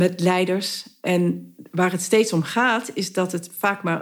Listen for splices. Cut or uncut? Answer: uncut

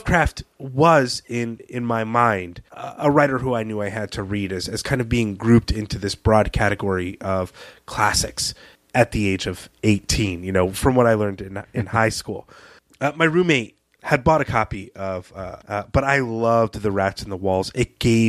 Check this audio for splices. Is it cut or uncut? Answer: cut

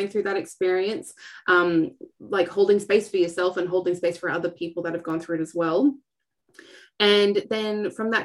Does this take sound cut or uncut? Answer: uncut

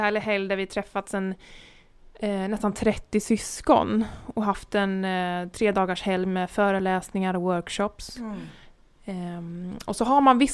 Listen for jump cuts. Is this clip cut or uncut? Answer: uncut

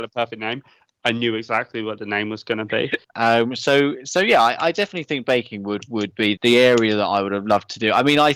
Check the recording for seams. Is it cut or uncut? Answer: cut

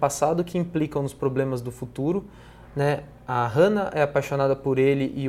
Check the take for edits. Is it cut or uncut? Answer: uncut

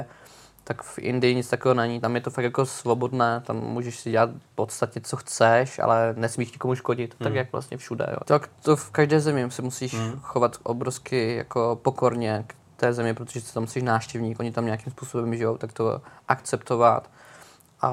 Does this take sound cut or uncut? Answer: cut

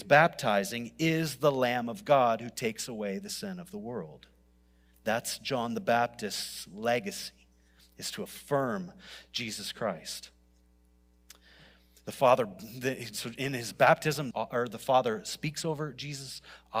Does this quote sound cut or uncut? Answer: cut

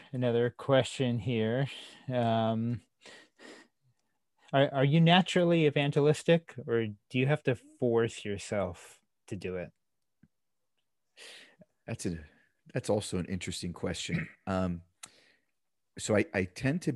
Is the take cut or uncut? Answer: uncut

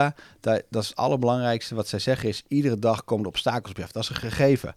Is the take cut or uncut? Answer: uncut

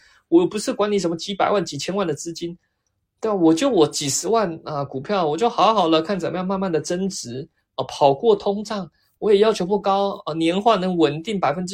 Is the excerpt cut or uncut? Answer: uncut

